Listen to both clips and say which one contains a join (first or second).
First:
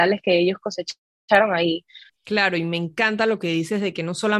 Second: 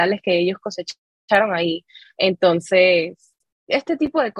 first